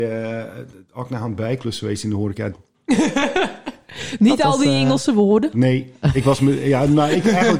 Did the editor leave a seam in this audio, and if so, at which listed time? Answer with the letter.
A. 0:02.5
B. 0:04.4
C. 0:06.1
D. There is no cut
A